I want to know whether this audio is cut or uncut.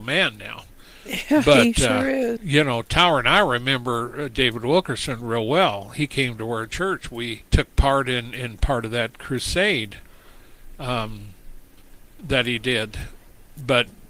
cut